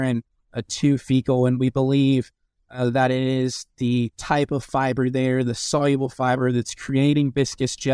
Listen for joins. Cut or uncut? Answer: uncut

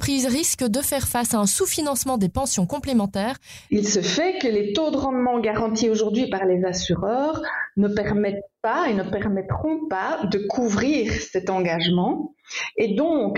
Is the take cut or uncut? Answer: cut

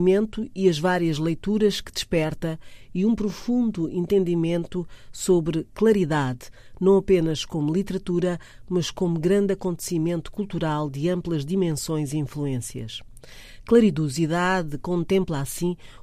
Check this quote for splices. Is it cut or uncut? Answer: uncut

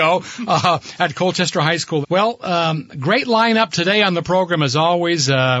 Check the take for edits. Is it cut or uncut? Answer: cut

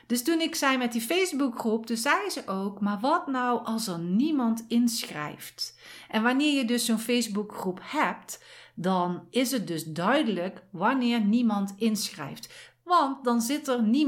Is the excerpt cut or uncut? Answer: uncut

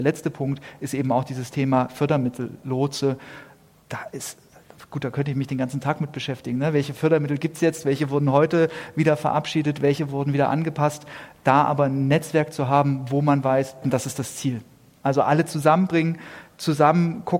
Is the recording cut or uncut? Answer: cut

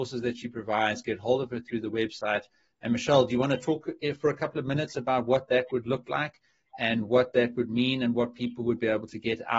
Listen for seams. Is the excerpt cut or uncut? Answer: uncut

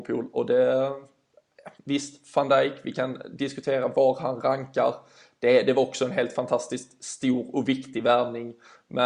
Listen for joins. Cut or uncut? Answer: uncut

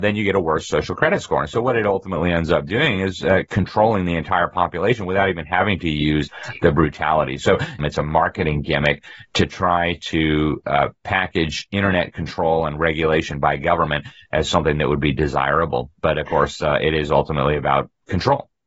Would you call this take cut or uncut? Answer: cut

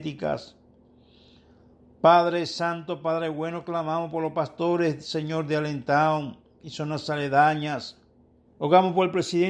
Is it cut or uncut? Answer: cut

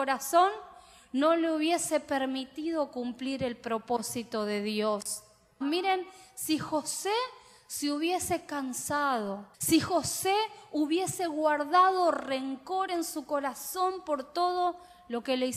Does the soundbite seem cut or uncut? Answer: cut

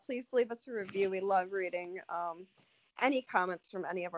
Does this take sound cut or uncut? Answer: uncut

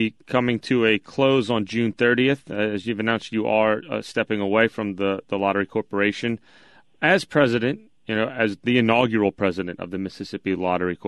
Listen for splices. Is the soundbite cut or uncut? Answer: uncut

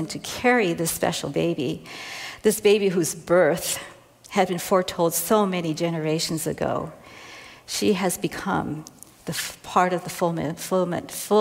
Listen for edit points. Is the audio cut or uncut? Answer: uncut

